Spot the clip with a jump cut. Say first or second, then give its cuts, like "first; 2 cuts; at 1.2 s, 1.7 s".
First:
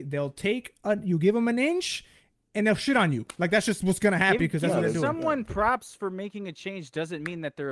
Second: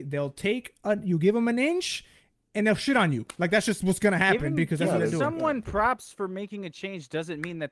first; 1 cut; at 4.4 s